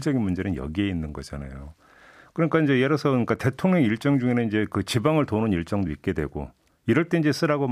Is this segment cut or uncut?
uncut